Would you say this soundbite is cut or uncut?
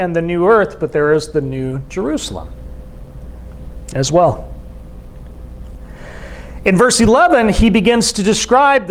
uncut